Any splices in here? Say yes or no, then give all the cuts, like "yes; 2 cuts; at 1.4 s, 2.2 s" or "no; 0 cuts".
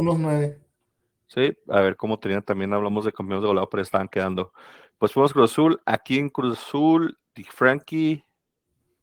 no; 0 cuts